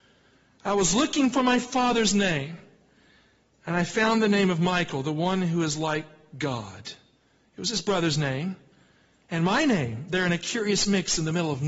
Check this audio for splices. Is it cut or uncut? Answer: uncut